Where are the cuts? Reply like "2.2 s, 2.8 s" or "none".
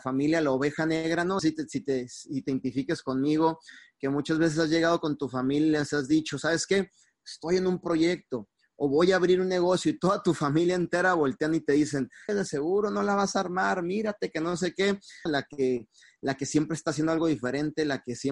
1.4 s, 12.3 s, 15.3 s